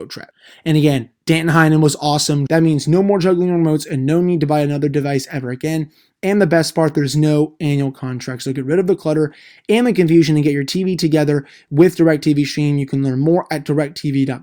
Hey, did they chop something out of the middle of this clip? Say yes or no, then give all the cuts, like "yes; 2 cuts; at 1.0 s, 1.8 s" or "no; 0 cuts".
yes; 1 cut; at 2.5 s